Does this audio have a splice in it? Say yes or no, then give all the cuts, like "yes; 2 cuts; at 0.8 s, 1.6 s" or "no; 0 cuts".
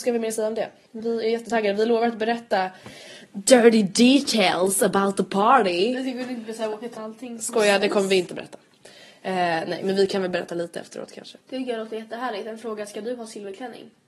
yes; 2 cuts; at 7.0 s, 11.4 s